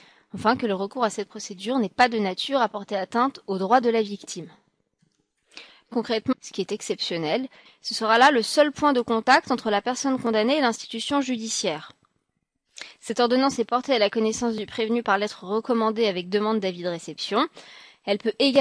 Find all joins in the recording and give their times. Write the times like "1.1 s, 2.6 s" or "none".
6.3 s, 7.7 s